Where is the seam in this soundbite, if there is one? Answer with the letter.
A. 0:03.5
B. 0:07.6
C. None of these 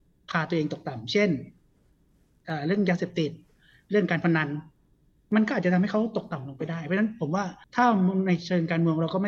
B